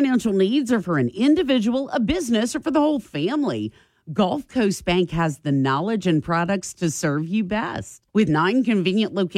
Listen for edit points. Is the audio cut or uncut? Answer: cut